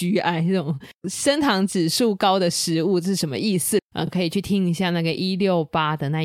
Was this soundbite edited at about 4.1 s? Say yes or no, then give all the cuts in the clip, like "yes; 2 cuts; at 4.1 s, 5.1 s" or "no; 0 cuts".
no; 0 cuts